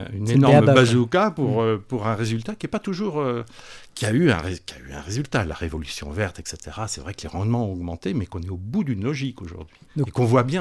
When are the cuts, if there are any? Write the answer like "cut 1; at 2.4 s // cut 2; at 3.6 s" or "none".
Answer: none